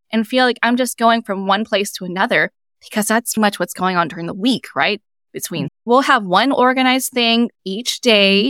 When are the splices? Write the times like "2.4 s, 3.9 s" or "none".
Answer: 3.4 s, 5.7 s